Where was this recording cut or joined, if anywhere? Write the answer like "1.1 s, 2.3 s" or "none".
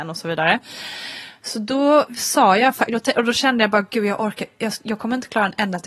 none